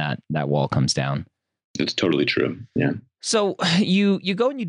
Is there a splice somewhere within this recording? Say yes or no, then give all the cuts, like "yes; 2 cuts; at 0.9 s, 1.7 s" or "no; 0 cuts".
no; 0 cuts